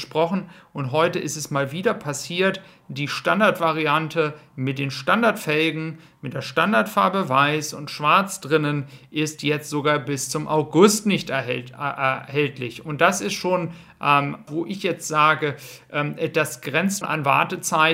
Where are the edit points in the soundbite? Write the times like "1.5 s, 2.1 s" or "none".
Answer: 14.5 s, 17.0 s